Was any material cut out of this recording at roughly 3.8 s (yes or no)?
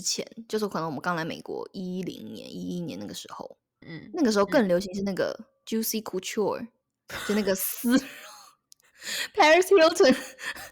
yes